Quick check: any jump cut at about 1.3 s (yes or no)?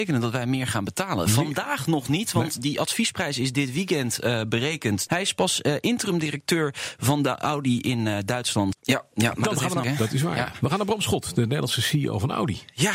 no